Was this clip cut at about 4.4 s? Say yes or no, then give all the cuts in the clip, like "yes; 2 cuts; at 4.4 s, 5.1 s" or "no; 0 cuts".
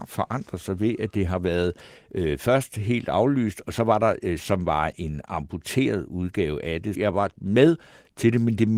yes; 2 cuts; at 4.4 s, 6.9 s